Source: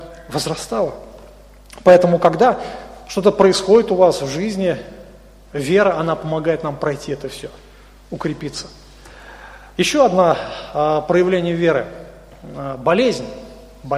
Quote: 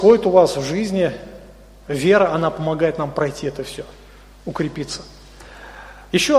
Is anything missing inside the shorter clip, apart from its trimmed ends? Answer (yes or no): no